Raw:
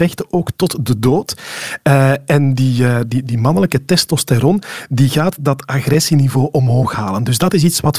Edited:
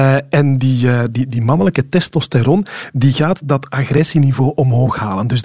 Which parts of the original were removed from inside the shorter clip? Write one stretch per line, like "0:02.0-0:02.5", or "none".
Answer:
none